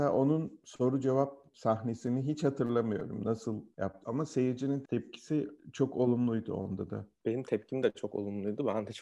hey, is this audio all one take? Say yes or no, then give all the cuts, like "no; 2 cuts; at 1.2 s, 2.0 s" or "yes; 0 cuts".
no; 2 cuts; at 4.0 s, 7.2 s